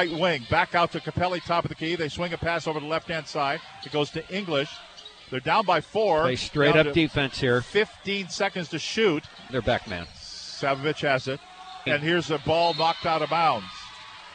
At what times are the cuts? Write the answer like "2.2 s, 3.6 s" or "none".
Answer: 9.5 s, 11.9 s